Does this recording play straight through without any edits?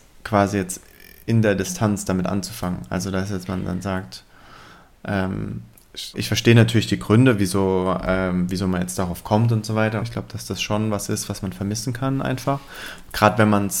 no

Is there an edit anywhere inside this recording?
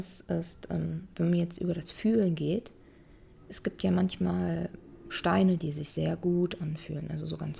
no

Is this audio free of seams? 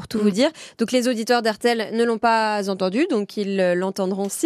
yes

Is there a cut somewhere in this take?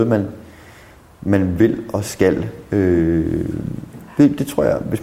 no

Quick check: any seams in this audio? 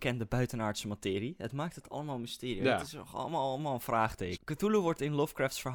yes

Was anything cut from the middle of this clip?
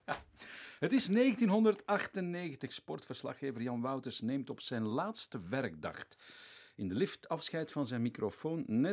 no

